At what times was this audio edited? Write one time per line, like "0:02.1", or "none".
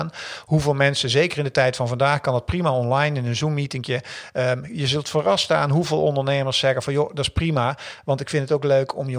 none